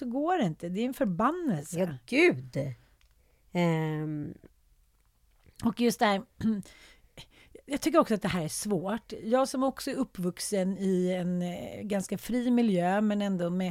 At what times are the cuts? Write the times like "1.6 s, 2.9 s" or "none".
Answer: none